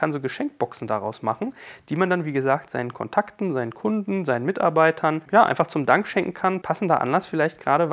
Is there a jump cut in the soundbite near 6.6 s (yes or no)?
no